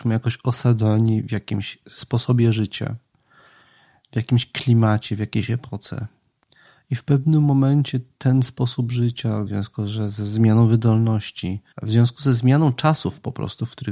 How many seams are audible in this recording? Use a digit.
2